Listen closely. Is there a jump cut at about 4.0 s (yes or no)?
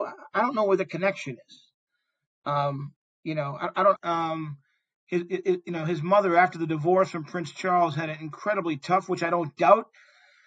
yes